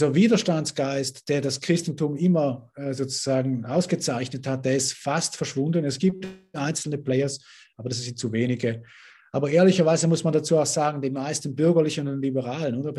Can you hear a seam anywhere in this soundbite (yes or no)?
no